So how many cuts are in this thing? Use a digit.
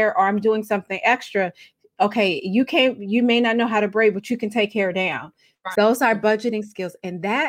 1